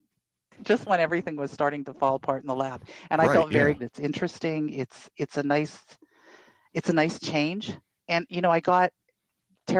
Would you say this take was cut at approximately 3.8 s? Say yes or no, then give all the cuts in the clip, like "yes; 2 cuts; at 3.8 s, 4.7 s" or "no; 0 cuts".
yes; 1 cut; at 3.8 s